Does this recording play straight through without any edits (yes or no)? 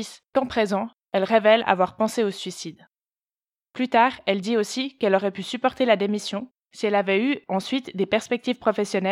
yes